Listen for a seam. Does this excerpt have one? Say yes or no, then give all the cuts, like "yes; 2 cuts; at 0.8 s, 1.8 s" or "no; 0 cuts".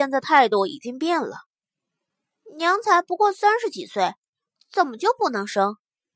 yes; 1 cut; at 4.6 s